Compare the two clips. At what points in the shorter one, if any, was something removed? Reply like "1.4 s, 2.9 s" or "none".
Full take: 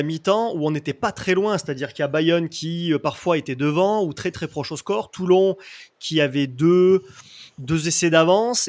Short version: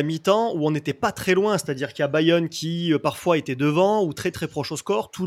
none